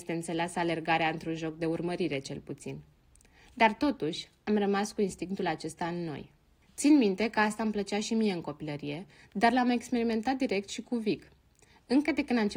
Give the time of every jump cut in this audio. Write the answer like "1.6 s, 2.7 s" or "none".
none